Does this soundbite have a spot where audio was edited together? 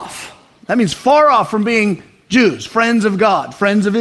no; 0 cuts

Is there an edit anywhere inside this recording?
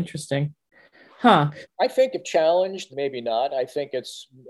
yes; 2 cuts; at 1.6 s, 2.9 s

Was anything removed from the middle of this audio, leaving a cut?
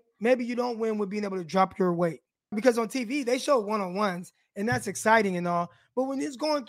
yes; 1 cut; at 2.5 s

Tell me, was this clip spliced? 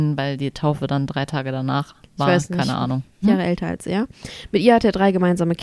yes; 1 cut; at 3.2 s

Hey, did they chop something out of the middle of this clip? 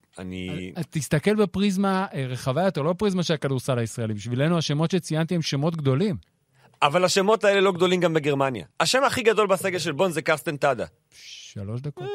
yes; 2 cuts; at 8.7 s, 11.0 s

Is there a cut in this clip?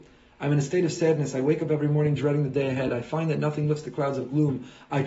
no; 0 cuts

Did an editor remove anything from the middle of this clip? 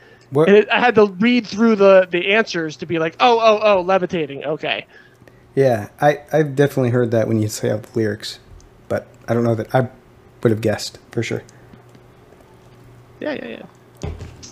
no; 0 cuts

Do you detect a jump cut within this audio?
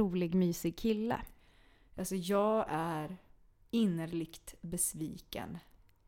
no; 0 cuts

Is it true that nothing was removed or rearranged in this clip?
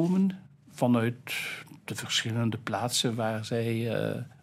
yes; 0 cuts

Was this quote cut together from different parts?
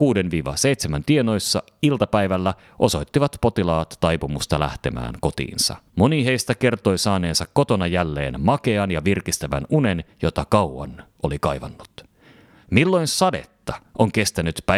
yes; 1 cut; at 5.9 s

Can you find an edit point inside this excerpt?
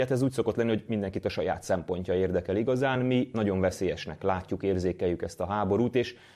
no; 0 cuts

